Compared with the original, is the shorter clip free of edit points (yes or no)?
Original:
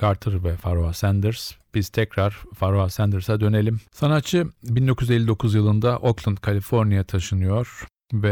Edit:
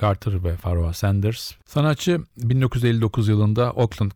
no